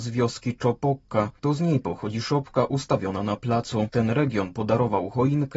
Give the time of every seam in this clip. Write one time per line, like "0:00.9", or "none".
0:03.9